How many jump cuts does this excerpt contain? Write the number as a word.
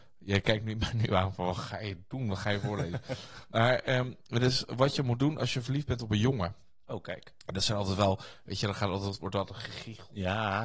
zero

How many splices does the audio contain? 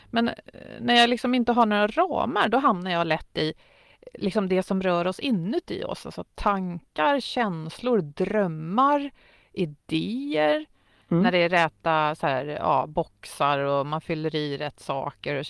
one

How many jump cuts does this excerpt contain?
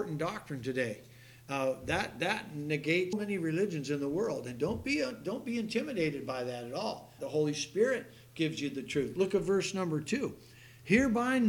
two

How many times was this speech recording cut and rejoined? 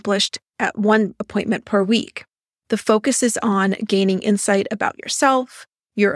one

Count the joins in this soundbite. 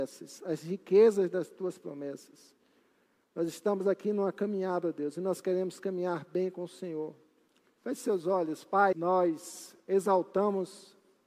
two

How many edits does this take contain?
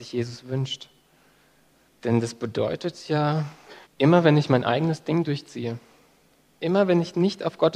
two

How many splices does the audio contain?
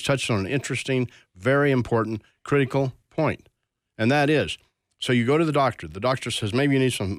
zero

